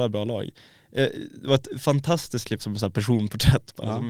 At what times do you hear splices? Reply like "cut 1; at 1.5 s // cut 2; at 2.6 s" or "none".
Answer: cut 1; at 2.6 s